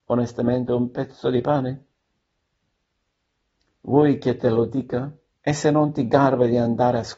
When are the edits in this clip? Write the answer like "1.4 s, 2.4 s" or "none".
5.3 s